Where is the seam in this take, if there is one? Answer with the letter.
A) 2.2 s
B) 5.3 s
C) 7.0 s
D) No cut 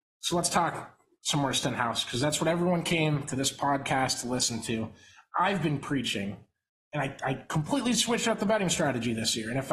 D